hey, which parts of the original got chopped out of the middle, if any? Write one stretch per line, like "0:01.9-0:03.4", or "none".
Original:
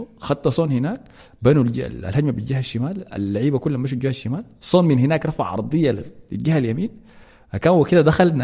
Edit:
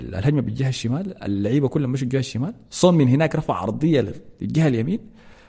none